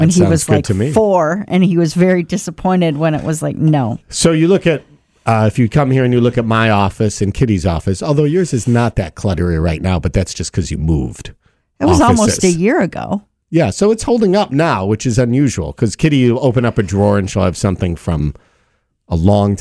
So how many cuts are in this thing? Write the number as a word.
zero